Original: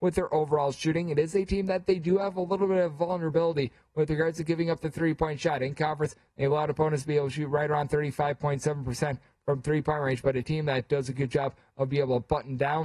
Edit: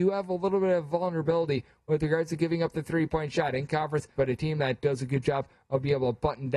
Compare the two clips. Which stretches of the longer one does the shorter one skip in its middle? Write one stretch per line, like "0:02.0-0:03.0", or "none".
0:06.2-0:10.2